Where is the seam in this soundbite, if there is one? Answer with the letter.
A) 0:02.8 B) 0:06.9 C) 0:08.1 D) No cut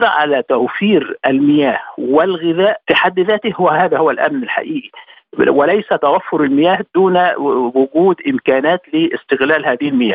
A